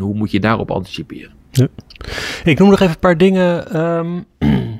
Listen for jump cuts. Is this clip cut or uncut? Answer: cut